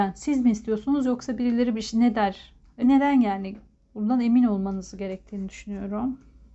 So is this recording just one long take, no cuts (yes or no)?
no